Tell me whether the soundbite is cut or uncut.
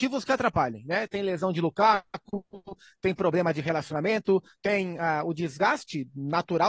uncut